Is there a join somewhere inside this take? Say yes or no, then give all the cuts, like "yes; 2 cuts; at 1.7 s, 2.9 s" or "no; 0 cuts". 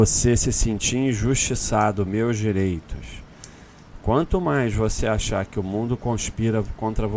no; 0 cuts